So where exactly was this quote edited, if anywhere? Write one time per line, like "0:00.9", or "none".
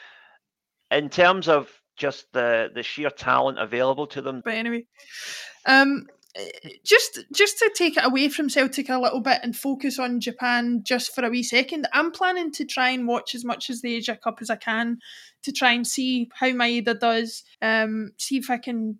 0:04.4
0:17.5